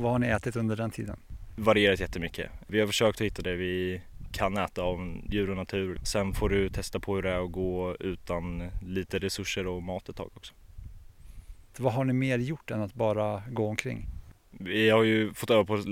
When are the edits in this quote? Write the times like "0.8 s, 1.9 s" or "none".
6.0 s, 11.7 s